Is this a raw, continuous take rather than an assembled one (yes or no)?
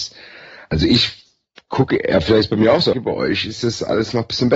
no